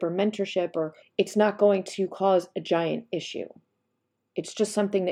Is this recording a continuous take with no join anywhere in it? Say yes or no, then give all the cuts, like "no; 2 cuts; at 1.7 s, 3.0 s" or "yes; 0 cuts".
no; 1 cut; at 1.0 s